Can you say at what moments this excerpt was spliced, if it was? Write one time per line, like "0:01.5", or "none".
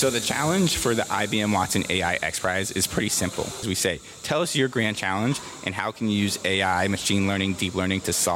0:03.6